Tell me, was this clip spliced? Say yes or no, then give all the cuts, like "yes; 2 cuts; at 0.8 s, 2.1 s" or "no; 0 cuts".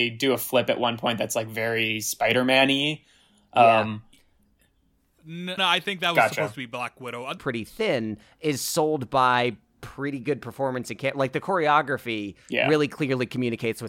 yes; 2 cuts; at 5.6 s, 7.4 s